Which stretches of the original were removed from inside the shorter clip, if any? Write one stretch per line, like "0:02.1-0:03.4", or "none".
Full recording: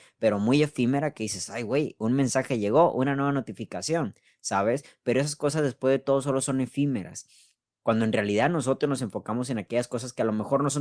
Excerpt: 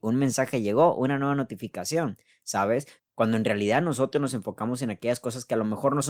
0:05.0-0:07.7